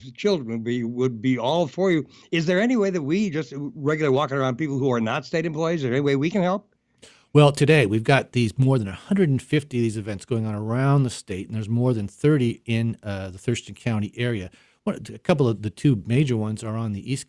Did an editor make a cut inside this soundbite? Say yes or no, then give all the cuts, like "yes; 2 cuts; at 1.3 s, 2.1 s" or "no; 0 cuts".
no; 0 cuts